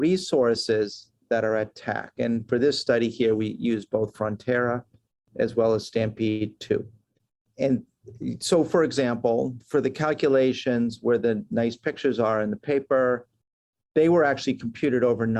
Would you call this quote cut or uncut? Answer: uncut